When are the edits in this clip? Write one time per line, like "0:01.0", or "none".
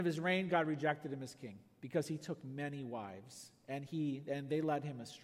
none